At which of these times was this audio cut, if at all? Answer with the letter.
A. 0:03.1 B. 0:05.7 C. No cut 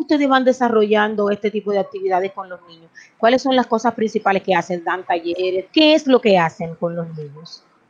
B